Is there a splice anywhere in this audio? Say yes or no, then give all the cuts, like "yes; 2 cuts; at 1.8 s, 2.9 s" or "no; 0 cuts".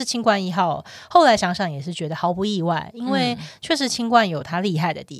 no; 0 cuts